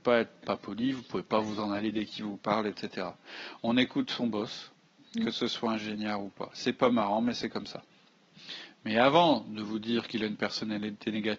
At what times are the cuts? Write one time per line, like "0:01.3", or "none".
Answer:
none